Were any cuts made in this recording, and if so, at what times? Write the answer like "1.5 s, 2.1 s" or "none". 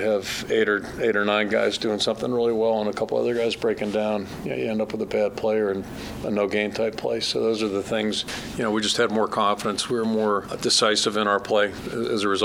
8.5 s